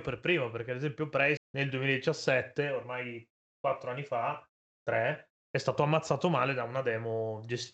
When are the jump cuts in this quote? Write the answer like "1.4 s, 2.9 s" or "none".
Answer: 1.4 s